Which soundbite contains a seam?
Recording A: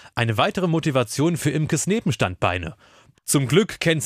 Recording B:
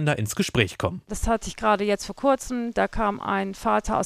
A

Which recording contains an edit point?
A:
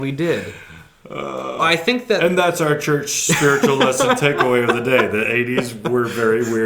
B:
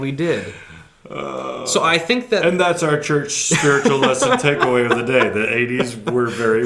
A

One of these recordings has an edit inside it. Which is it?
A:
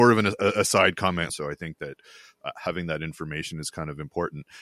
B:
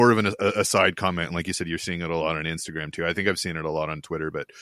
A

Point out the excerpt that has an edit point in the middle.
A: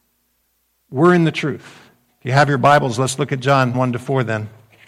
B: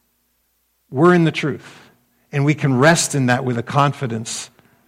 A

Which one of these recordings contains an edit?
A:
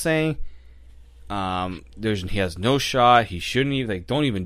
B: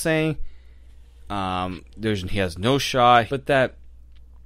B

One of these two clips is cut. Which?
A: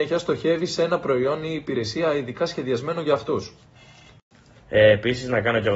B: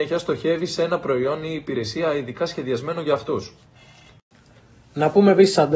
A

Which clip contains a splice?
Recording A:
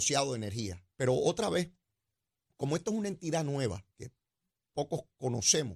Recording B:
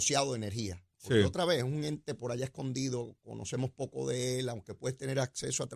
A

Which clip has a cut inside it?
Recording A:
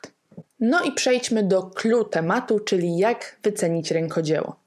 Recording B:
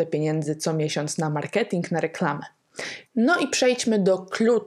B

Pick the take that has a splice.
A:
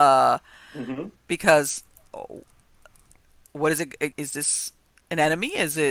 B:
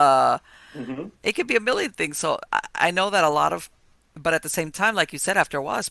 A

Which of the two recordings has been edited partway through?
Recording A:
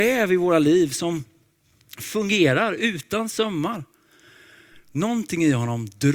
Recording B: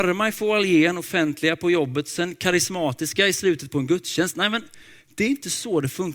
A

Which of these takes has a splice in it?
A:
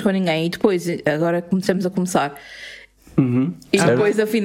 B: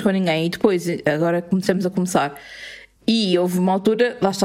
A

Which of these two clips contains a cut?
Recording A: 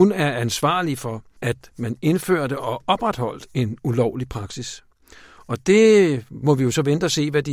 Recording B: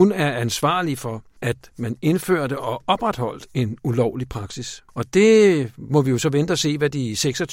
B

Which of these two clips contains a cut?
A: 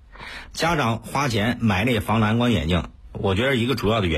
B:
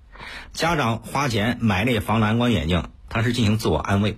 B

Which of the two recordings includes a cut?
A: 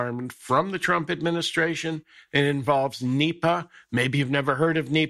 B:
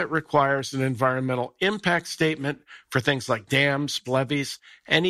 B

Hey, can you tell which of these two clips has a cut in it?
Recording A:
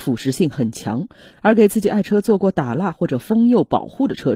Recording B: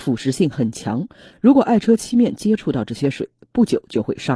A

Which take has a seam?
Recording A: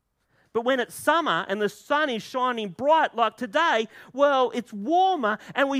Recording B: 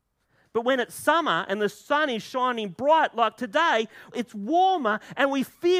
B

